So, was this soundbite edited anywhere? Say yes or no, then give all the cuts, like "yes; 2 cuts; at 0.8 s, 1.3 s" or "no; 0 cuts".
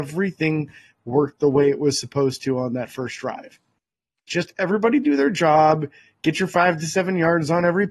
yes; 1 cut; at 4.3 s